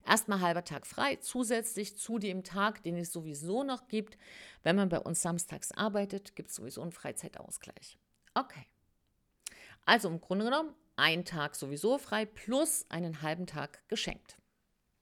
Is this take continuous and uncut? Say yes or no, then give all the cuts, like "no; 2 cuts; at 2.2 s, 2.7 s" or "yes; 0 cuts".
yes; 0 cuts